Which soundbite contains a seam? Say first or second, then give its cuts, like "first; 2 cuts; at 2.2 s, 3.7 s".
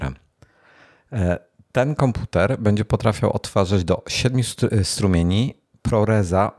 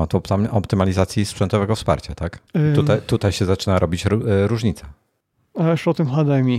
second; 1 cut; at 2.5 s